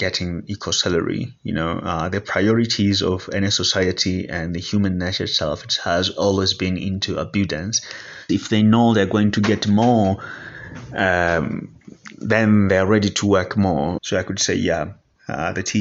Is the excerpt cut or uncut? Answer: cut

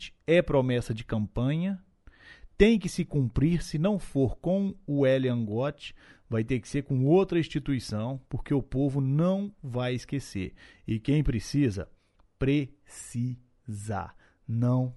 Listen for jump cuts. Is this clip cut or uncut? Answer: uncut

